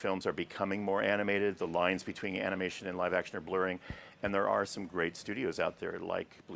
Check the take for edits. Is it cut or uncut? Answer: uncut